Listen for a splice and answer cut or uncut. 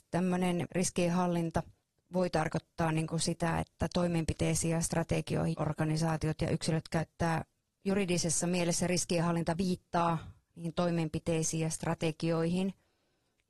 cut